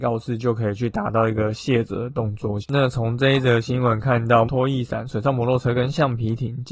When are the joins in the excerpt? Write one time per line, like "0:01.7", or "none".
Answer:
0:02.6
0:04.5